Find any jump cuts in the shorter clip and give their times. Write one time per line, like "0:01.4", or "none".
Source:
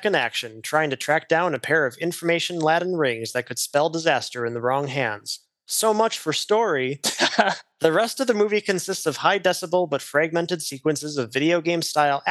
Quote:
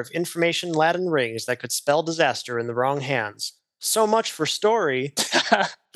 none